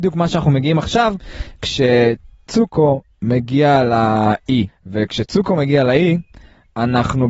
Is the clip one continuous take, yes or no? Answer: no